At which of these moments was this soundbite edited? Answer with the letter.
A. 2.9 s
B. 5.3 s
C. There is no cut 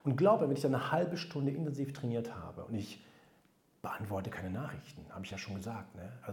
C